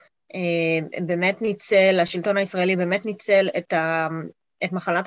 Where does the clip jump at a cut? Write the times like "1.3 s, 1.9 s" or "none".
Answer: none